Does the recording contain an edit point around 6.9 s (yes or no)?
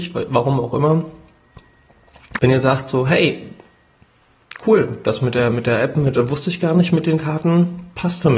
no